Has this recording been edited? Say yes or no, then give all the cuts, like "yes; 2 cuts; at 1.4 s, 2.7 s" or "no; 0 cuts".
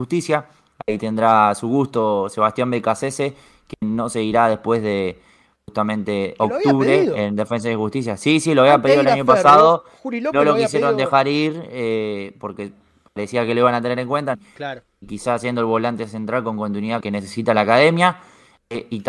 yes; 2 cuts; at 14.3 s, 17.0 s